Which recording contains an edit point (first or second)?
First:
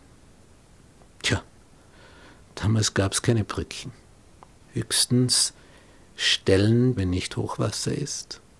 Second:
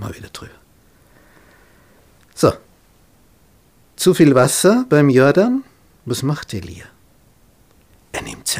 first